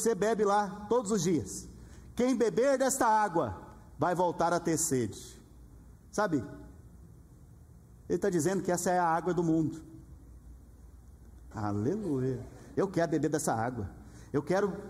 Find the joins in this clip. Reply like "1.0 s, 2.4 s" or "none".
11.5 s, 12.8 s